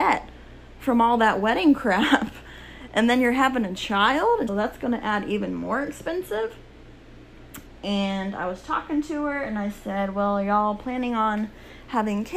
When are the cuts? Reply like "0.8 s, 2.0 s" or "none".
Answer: 4.5 s, 7.7 s

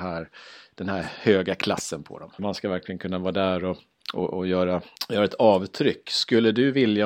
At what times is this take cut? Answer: 2.4 s

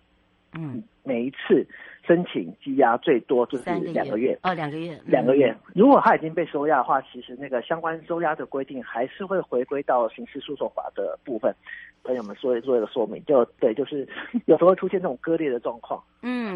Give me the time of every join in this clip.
5.7 s, 11.9 s

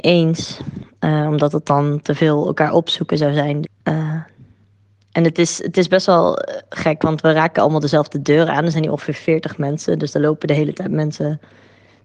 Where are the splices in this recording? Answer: 3.6 s

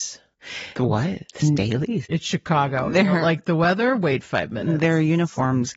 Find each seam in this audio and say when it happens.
2.0 s

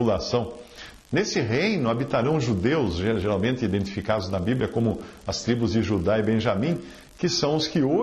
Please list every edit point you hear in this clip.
1.0 s

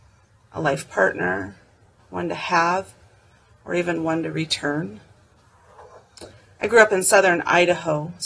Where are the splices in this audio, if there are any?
2.0 s

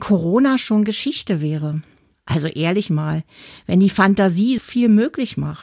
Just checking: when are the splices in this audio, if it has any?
2.1 s, 4.6 s

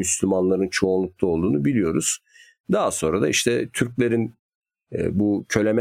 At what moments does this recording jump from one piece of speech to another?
none

